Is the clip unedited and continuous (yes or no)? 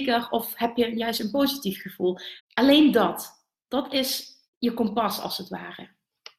no